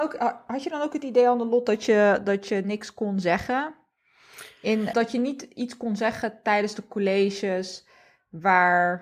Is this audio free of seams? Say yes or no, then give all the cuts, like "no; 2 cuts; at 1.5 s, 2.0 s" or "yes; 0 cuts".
no; 1 cut; at 4.9 s